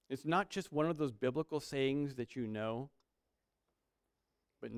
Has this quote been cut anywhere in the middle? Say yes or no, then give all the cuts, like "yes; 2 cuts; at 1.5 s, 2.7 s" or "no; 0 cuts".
no; 0 cuts